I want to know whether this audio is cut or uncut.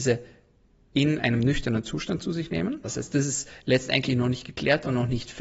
cut